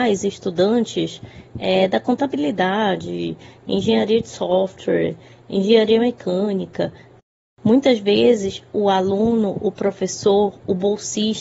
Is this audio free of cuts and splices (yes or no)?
yes